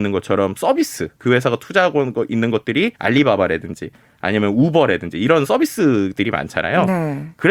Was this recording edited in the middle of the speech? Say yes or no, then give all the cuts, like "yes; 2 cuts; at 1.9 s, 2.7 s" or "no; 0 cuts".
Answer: yes; 2 cuts; at 1.2 s, 3.0 s